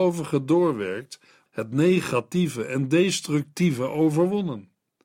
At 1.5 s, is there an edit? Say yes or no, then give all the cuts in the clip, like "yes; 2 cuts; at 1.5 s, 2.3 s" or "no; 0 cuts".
yes; 1 cut; at 1.5 s